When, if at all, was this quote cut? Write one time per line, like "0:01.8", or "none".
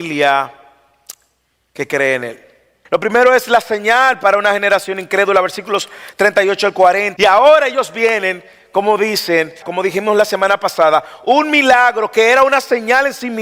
0:02.8
0:07.2
0:09.6

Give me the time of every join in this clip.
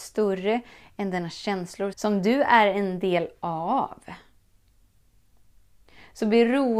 0:01.9

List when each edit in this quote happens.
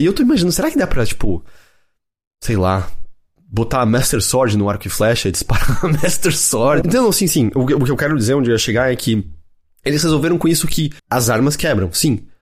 0:06.8
0:11.0

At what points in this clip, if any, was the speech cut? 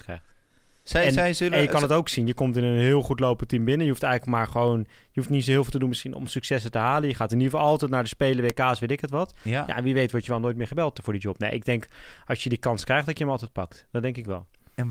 none

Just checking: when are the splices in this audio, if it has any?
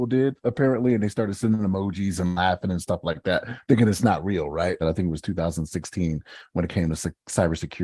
0:04.8

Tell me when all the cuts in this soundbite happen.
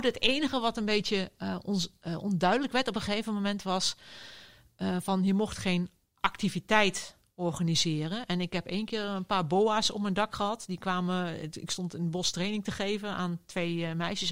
none

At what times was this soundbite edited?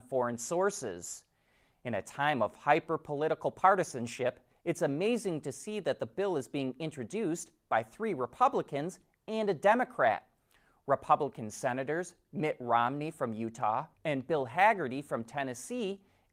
0:14.0

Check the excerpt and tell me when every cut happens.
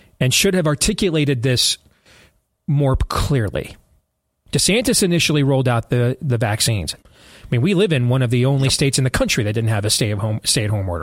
0:04.3
0:07.0

